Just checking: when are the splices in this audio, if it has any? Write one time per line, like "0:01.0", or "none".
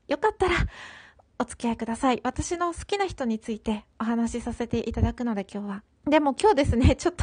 0:05.9

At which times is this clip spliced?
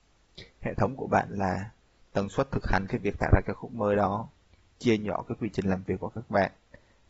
none

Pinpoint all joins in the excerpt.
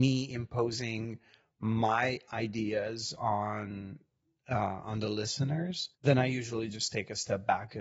0:05.9

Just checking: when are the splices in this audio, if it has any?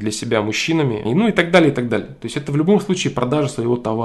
0:01.0

